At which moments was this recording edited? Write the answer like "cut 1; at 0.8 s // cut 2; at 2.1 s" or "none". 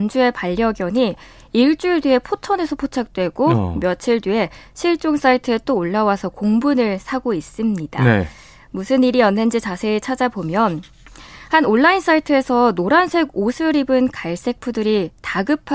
none